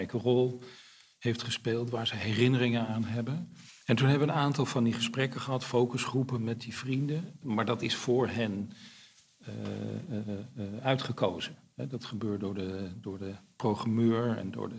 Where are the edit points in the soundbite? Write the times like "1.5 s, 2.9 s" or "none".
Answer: 7.4 s

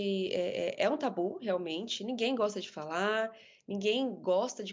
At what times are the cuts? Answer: none

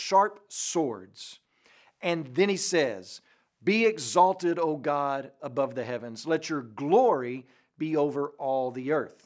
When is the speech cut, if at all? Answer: none

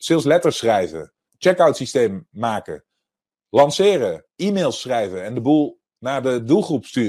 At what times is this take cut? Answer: 1.3 s

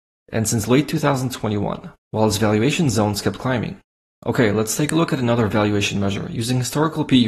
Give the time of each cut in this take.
2.0 s, 4.1 s

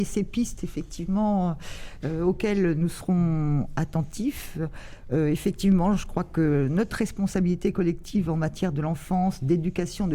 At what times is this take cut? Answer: none

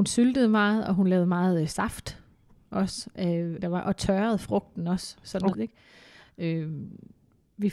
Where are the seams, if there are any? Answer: 3.6 s, 5.5 s

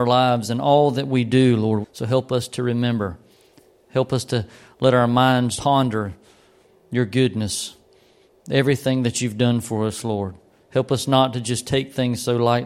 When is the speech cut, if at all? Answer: 1.8 s, 5.6 s

